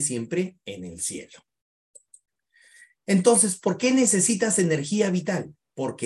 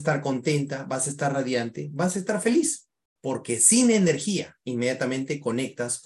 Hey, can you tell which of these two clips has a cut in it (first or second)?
second